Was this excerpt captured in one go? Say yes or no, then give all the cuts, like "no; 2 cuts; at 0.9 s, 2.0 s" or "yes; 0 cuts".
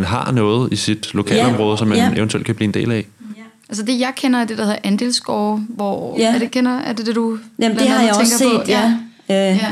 yes; 0 cuts